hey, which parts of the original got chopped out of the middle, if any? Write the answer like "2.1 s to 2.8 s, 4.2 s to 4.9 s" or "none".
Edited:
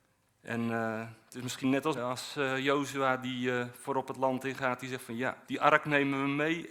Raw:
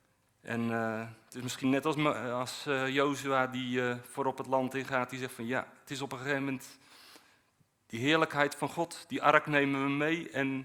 1.9 s to 2.2 s, 5.7 s to 9.1 s